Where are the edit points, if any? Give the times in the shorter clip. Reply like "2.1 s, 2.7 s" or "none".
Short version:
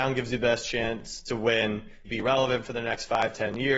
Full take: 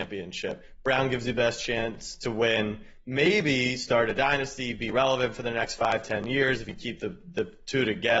2.0 s

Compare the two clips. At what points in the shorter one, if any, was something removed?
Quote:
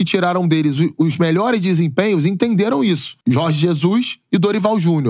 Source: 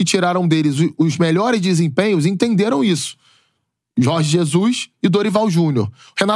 3.2 s

